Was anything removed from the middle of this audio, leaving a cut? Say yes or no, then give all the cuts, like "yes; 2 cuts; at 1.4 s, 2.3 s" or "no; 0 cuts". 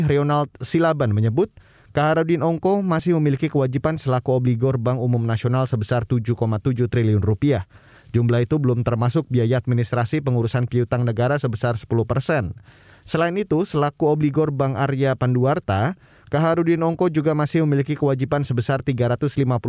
no; 0 cuts